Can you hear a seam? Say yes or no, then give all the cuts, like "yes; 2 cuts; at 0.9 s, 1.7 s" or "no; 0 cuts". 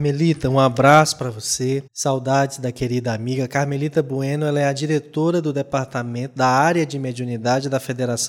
yes; 1 cut; at 1.9 s